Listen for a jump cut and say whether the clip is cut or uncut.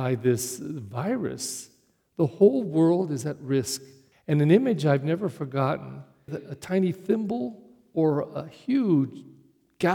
cut